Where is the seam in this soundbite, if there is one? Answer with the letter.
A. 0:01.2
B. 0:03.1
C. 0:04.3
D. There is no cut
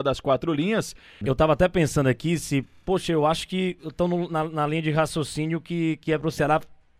A